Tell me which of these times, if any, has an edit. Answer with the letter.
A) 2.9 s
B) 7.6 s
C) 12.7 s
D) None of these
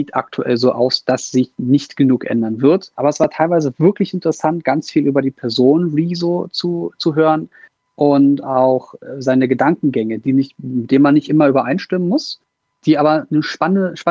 A